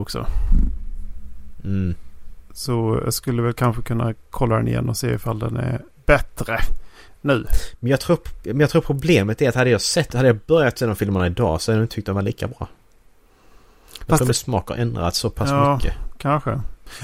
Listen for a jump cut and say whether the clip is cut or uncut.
uncut